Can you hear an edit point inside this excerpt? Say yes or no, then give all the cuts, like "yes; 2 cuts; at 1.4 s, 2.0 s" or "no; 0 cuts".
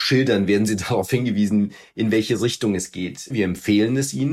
yes; 1 cut; at 3.3 s